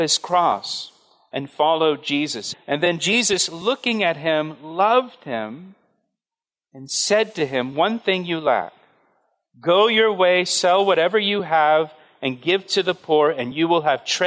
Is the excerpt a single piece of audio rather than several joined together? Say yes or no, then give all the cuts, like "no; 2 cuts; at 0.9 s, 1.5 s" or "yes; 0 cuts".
no; 1 cut; at 2.5 s